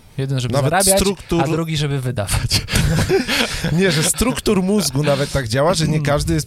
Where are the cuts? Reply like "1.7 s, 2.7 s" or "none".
3.1 s